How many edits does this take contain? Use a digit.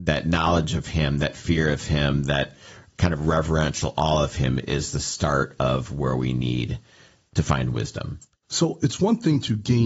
1